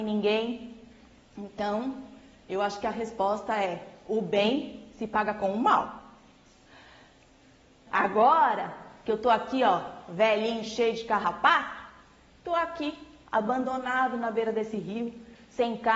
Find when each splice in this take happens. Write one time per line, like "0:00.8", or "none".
0:07.9

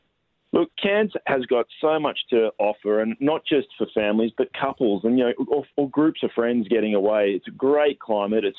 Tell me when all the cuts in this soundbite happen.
none

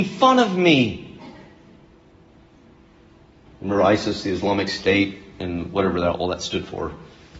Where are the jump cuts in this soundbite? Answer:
0:03.4

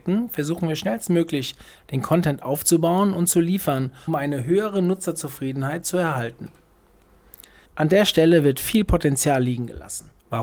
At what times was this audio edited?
0:04.1
0:07.7

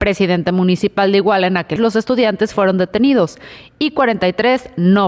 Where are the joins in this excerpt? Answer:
0:01.8

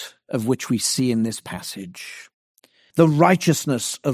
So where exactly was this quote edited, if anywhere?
0:02.9

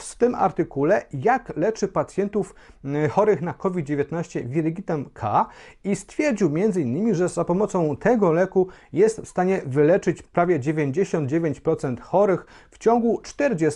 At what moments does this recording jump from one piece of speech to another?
none

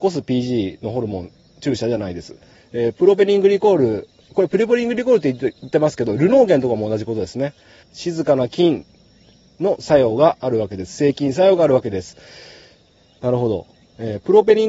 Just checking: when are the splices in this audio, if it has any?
0:02.5
0:07.8

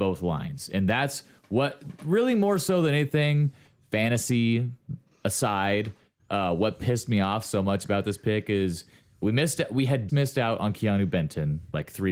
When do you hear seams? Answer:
0:10.1

